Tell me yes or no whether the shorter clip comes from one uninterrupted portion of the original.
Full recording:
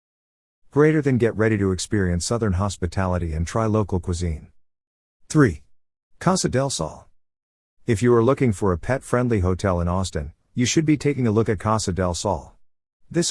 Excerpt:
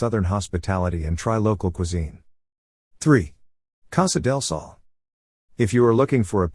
yes